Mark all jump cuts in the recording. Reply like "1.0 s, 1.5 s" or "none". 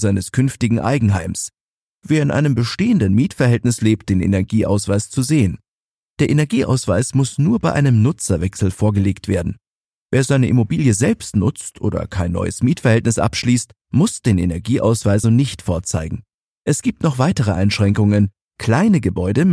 4.0 s, 15.2 s